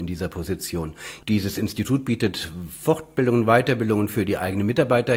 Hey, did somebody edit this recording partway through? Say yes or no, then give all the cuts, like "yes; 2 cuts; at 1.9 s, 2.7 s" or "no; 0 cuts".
yes; 1 cut; at 1.2 s